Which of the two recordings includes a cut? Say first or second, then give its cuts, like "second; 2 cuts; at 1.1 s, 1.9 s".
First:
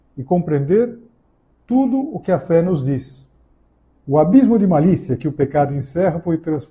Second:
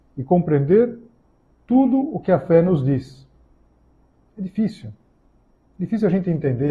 first; 1 cut; at 3.9 s